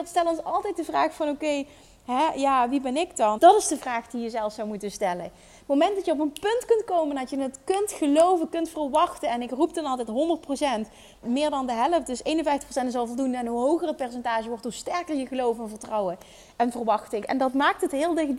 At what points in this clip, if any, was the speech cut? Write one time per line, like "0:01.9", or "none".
0:03.4
0:11.2
0:17.2